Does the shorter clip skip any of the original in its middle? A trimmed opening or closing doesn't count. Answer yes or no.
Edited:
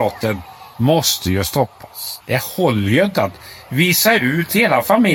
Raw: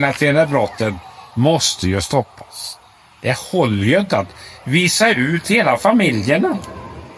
yes